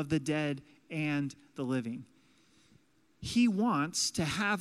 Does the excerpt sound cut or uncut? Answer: uncut